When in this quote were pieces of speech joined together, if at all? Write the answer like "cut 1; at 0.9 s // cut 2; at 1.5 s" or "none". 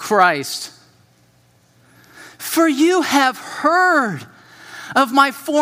none